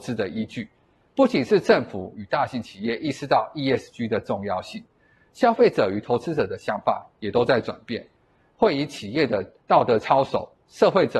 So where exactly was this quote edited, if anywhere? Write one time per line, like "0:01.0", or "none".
0:01.0